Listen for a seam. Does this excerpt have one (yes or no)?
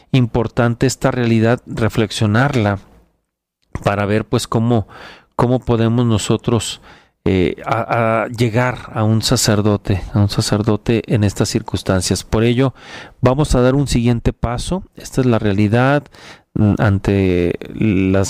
no